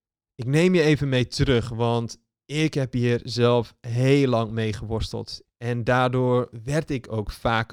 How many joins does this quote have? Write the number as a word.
one